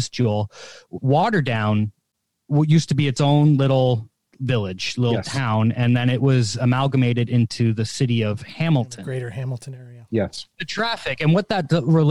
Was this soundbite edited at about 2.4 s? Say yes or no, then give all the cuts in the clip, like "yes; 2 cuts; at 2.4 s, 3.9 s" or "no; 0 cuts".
no; 1 cut; at 10.6 s